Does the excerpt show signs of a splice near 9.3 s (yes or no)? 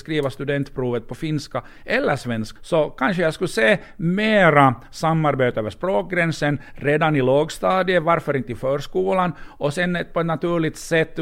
no